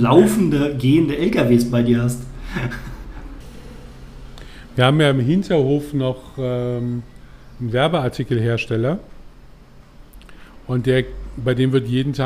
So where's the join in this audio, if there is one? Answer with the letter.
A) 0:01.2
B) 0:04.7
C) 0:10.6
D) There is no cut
D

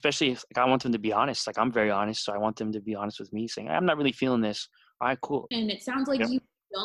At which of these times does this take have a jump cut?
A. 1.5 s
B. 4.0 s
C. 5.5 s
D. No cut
C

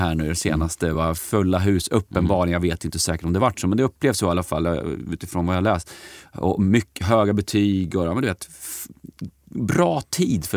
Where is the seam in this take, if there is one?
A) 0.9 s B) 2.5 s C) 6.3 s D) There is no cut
D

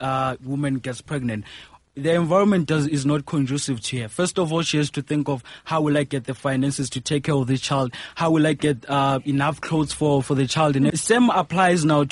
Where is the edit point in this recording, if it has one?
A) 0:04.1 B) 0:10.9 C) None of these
B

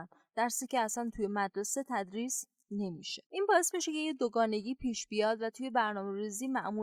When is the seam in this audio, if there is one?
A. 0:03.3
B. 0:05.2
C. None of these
A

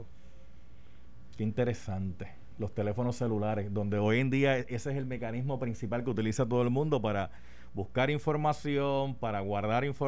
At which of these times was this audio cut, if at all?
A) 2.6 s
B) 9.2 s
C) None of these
C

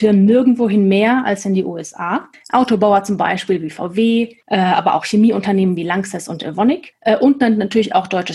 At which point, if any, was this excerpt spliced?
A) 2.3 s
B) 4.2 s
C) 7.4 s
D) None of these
A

